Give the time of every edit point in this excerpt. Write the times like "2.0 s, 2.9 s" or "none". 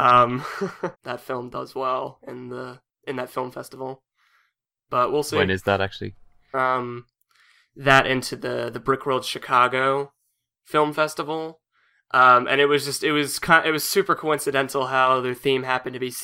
0.9 s, 6.5 s